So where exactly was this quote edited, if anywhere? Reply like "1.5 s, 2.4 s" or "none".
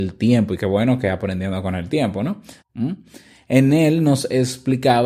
2.6 s